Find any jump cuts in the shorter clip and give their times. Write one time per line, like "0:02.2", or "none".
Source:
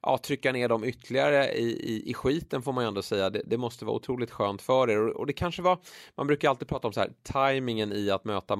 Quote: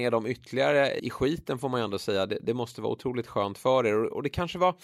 0:01.0